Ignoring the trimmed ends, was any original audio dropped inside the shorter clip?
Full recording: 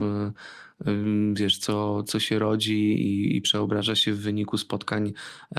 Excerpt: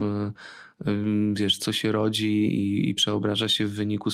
yes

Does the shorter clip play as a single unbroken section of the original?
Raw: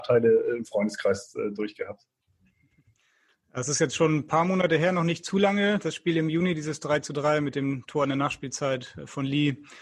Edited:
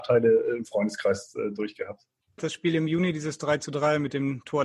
no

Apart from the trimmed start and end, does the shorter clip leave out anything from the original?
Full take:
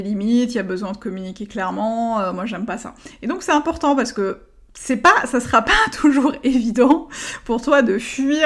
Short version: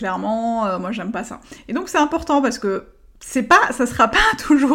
no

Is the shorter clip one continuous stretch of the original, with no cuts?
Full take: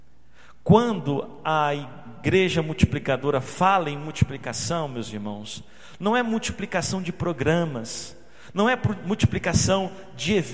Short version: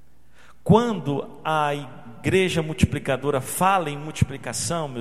yes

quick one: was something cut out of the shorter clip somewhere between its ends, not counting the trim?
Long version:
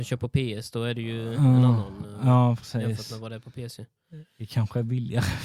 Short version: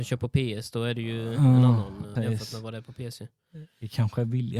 yes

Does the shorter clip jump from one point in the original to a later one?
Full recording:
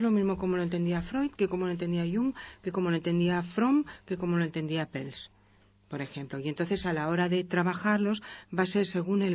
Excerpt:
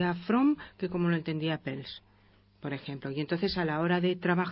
no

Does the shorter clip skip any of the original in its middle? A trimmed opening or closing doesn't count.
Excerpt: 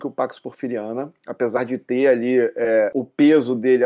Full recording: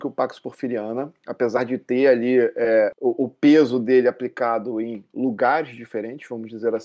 yes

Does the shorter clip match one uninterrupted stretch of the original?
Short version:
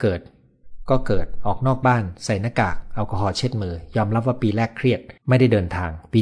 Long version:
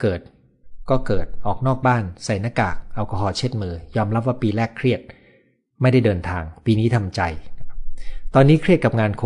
no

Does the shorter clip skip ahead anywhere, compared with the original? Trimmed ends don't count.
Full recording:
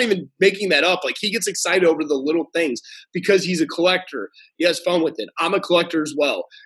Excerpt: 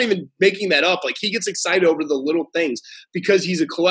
no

